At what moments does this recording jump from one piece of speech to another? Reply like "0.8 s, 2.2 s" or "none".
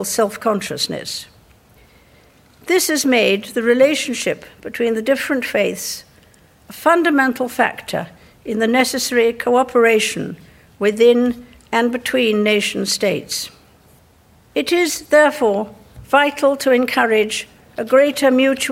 none